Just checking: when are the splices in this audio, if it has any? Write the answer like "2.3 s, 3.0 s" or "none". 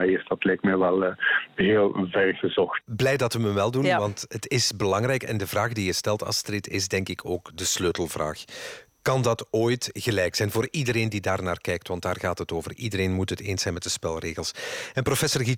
2.8 s